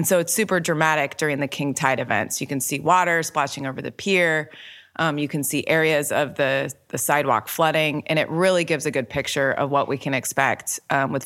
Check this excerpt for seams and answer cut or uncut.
uncut